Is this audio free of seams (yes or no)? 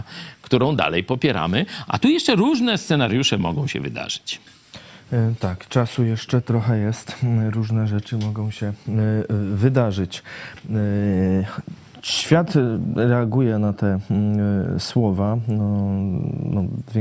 yes